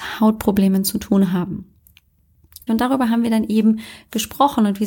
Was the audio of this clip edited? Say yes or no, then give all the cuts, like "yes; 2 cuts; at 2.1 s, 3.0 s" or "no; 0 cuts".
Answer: yes; 1 cut; at 2.7 s